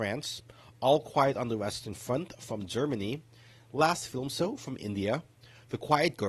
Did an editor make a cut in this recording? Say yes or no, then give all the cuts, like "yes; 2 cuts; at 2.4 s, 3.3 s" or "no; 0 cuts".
no; 0 cuts